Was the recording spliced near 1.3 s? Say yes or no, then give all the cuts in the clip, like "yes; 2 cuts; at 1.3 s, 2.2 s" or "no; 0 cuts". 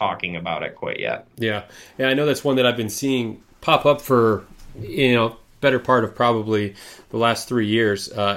no; 0 cuts